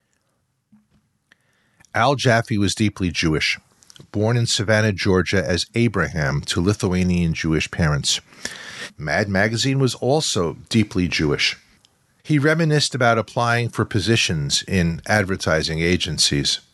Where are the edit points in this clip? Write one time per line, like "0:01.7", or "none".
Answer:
0:08.9
0:12.2

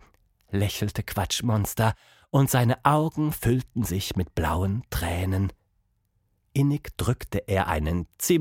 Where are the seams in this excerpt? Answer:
none

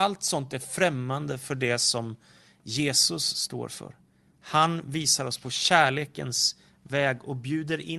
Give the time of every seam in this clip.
none

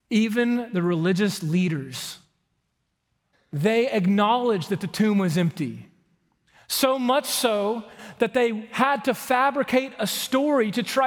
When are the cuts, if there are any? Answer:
0:03.3

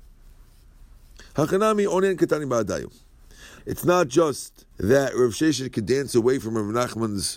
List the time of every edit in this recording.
0:03.6
0:04.7

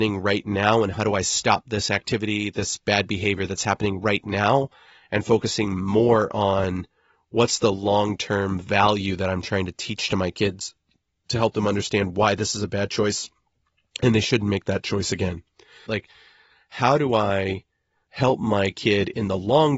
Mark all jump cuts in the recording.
0:15.9

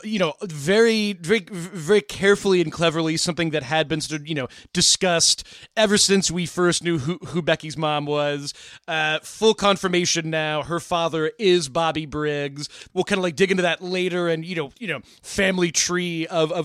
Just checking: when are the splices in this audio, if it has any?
0:12.9
0:14.7

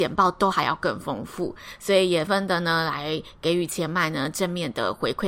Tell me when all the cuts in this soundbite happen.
0:02.3

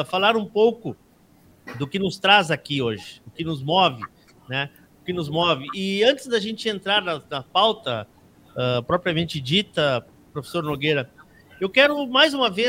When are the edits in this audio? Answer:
none

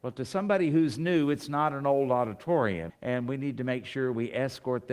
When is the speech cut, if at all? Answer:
0:02.9

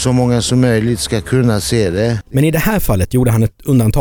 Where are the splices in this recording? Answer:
0:02.2

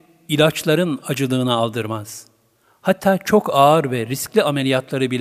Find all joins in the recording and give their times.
none

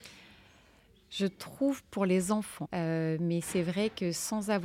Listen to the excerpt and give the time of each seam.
0:02.6

